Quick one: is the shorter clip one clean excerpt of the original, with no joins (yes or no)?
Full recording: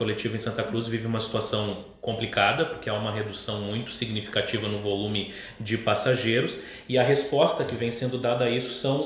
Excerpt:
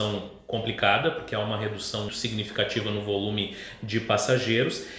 no